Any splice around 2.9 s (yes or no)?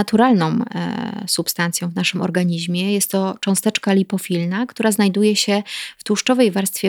no